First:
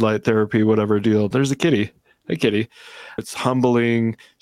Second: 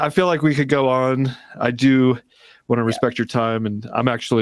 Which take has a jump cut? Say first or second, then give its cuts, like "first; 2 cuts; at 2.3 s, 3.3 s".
first; 2 cuts; at 1.3 s, 3.2 s